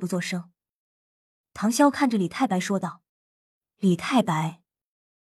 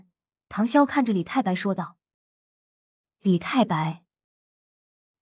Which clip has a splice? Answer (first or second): first